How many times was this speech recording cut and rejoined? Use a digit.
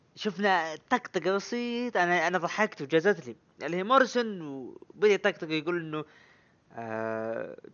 0